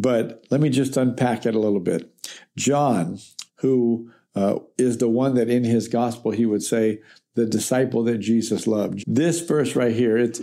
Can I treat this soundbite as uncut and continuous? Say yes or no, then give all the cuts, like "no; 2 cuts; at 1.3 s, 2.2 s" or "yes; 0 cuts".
no; 2 cuts; at 3.5 s, 9.0 s